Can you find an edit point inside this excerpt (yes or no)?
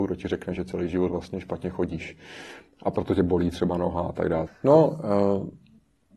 yes